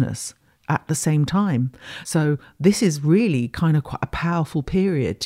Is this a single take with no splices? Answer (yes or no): yes